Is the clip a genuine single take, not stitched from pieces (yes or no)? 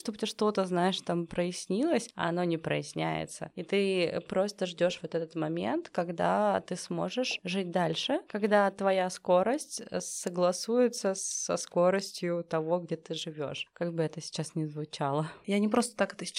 no